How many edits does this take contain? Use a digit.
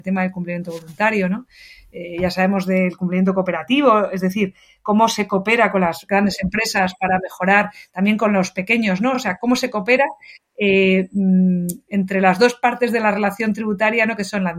0